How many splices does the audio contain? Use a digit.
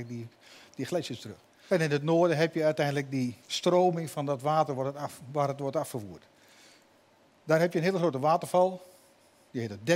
1